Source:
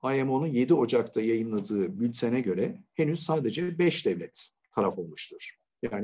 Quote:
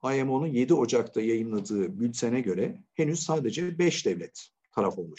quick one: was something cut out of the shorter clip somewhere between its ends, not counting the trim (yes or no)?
no